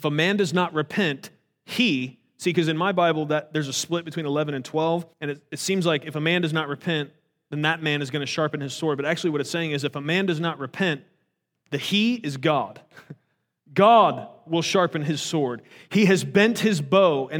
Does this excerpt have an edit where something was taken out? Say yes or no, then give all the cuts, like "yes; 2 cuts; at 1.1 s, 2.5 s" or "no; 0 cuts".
yes; 1 cut; at 5.1 s